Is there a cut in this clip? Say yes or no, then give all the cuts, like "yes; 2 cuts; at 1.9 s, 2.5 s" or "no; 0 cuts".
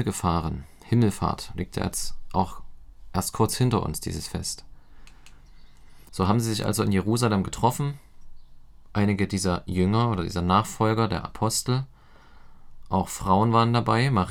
yes; 1 cut; at 6.1 s